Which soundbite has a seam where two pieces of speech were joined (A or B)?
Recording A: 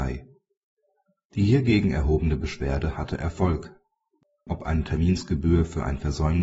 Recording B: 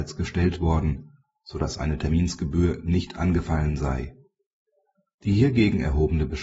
A